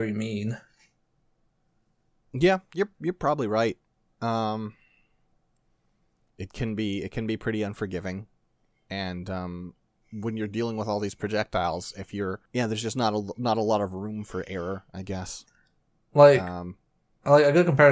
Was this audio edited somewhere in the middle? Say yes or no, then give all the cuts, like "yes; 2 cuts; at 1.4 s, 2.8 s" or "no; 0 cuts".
yes; 1 cut; at 12.5 s